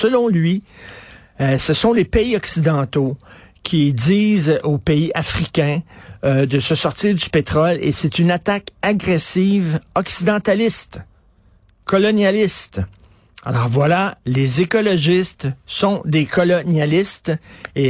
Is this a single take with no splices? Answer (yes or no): yes